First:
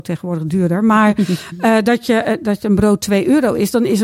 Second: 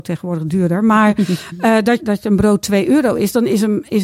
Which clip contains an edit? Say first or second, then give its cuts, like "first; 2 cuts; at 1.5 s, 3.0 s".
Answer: second; 1 cut; at 2.0 s